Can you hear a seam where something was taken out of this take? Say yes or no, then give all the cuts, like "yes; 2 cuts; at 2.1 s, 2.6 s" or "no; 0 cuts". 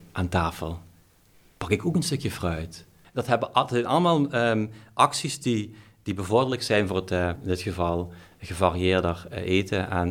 yes; 2 cuts; at 3.0 s, 7.4 s